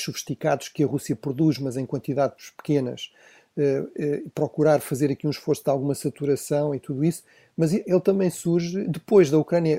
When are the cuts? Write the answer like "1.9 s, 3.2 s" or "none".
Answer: 8.9 s